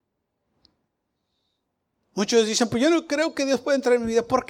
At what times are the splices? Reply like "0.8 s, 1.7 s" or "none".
none